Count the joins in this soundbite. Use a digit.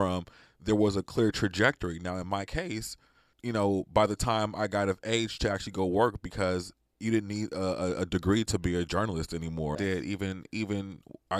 2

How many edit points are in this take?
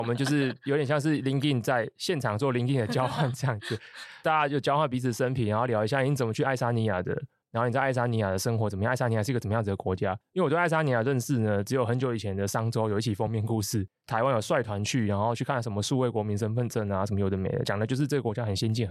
1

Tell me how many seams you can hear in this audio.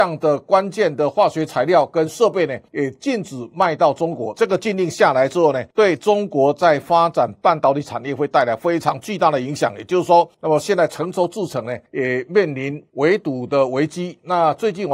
2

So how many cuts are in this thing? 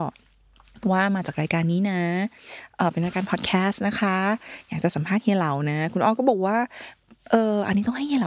0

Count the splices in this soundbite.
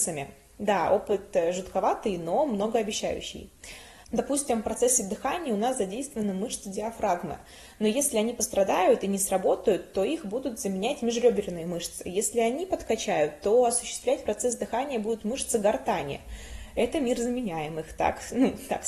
1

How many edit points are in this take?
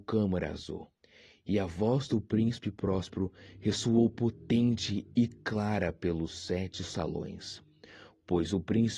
0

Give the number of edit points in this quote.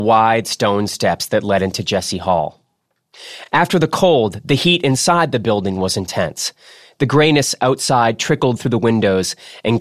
0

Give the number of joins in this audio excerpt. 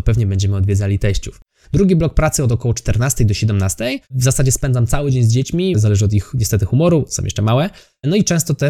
3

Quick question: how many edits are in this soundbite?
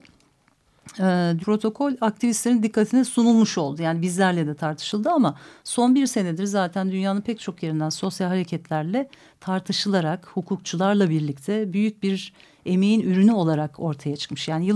1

